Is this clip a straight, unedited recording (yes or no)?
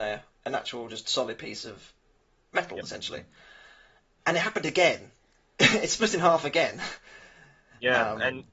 yes